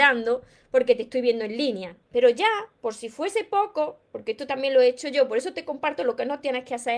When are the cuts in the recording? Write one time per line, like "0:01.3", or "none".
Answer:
0:02.1